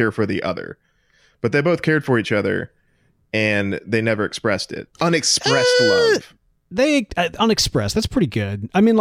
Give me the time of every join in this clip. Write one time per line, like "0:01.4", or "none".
0:04.9